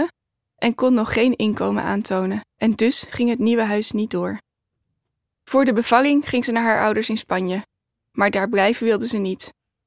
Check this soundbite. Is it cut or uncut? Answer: cut